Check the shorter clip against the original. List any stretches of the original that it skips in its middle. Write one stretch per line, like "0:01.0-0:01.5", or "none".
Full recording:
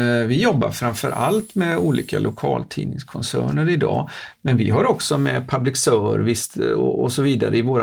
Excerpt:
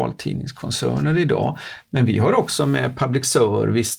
none